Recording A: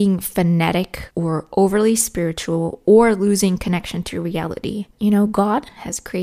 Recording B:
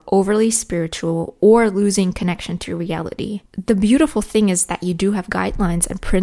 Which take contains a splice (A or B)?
A